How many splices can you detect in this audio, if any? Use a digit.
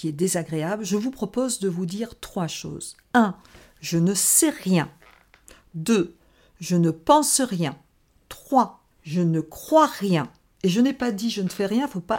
1